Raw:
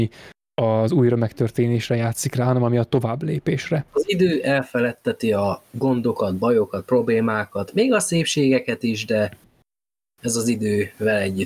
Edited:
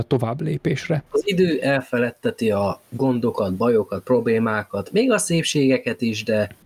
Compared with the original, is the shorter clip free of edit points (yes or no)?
yes